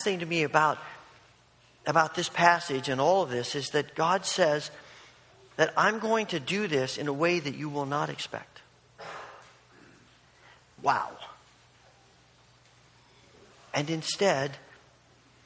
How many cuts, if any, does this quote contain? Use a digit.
1